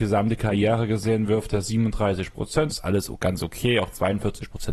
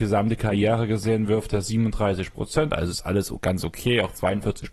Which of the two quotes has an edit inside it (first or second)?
first